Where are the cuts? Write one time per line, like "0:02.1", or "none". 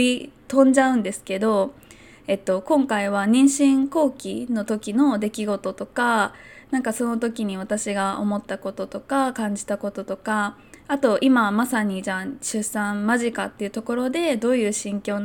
none